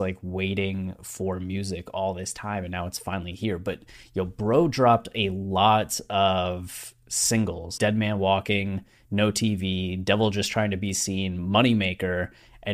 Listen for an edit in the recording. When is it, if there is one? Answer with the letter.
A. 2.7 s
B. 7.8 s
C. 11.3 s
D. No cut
B